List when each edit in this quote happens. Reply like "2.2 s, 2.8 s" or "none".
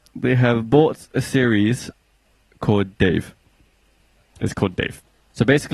4.3 s